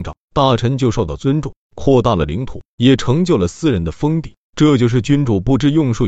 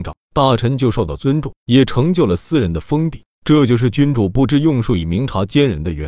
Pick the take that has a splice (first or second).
second